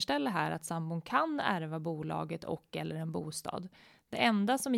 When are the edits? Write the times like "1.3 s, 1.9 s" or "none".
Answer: none